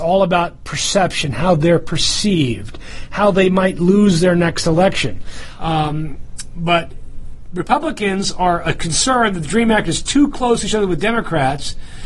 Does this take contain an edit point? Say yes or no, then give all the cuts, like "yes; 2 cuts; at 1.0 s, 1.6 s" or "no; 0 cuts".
yes; 1 cut; at 5.6 s